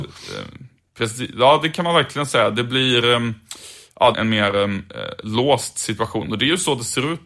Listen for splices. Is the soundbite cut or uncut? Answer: cut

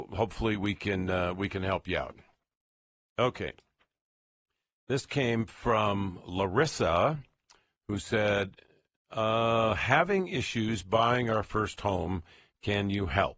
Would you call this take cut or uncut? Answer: uncut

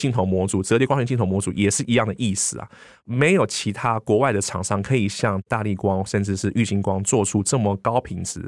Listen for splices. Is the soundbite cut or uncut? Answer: uncut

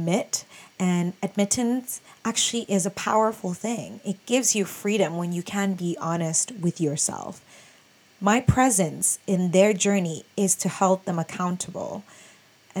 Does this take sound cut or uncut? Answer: uncut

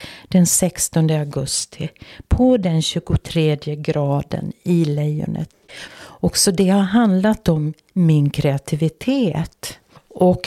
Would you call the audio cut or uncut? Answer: cut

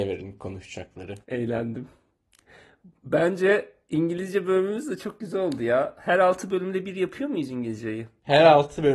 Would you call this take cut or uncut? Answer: cut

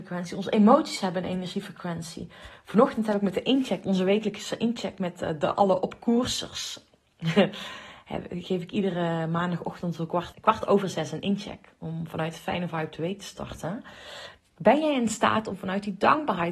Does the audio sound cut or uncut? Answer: cut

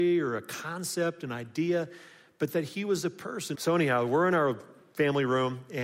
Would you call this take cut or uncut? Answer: cut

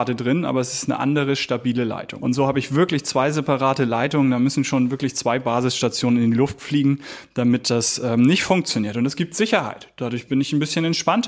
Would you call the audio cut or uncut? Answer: cut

